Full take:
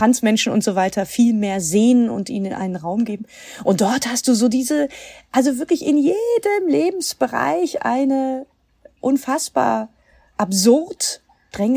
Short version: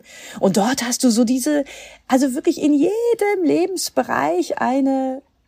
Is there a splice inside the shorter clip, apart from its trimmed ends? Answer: no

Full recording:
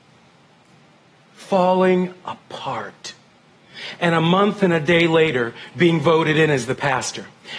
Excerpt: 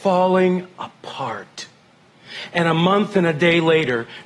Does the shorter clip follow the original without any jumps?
yes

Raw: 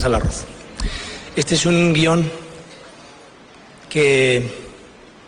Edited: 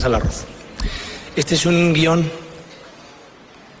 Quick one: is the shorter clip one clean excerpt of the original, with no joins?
yes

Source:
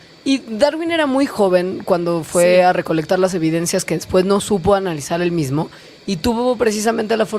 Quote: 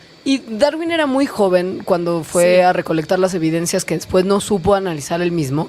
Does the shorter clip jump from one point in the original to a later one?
no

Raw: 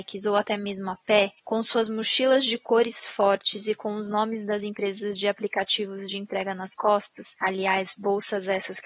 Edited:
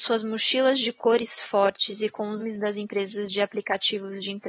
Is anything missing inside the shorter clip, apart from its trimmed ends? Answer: yes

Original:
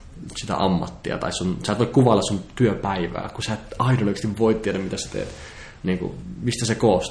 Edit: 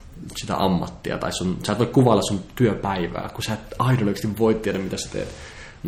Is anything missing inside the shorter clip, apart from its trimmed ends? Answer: no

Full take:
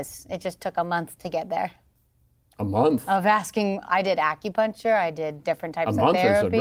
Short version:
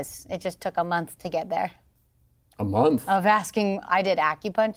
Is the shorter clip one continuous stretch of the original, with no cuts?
yes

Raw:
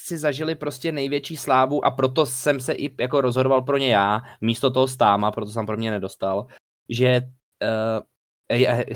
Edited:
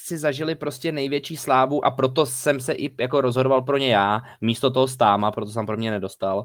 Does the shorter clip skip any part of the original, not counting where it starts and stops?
no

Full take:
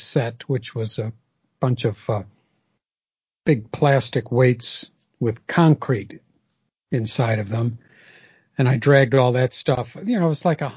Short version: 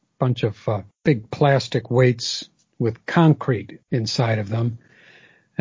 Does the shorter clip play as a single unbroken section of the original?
no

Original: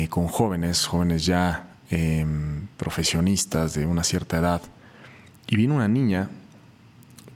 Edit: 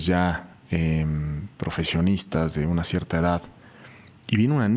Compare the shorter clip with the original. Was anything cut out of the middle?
no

